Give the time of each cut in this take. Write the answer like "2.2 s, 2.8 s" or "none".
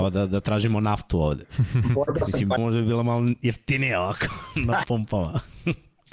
2.6 s